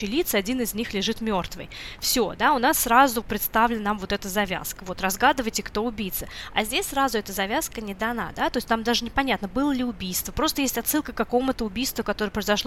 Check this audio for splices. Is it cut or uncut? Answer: cut